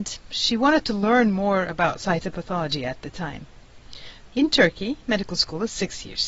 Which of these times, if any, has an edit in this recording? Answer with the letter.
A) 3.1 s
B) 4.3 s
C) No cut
B